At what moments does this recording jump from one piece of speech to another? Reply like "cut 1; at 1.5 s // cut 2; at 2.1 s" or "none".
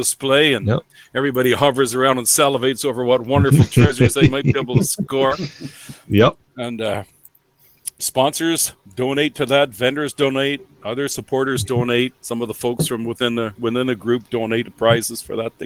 cut 1; at 8.0 s // cut 2; at 12.2 s